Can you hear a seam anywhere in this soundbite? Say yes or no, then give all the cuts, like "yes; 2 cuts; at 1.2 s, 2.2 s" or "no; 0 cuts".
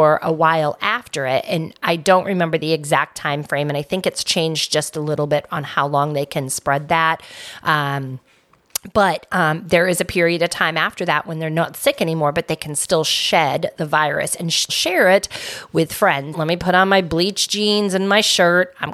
yes; 2 cuts; at 14.7 s, 16.3 s